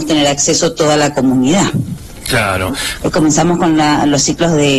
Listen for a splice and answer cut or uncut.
cut